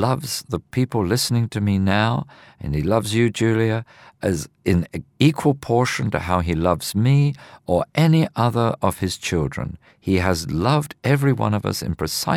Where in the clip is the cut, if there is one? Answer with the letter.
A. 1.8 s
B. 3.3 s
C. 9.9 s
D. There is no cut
C